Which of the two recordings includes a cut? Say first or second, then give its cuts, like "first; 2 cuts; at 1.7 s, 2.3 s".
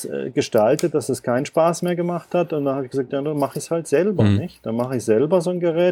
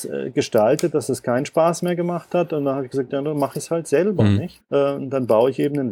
second; 1 cut; at 4.6 s